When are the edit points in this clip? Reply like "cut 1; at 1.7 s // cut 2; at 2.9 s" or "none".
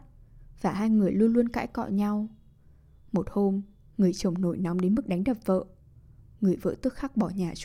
none